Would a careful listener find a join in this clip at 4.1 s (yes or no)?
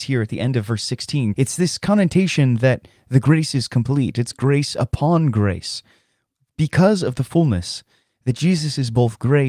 no